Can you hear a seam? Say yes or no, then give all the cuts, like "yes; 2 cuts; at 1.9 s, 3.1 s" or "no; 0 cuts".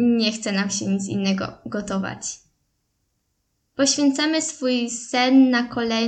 no; 0 cuts